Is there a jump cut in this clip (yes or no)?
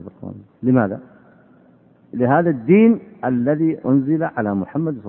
yes